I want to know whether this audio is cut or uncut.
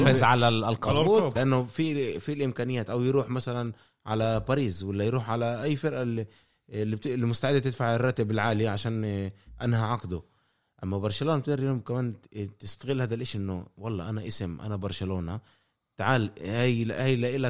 cut